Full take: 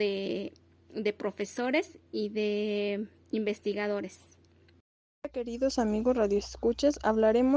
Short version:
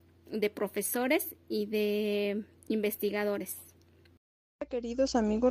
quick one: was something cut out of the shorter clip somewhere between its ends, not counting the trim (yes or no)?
no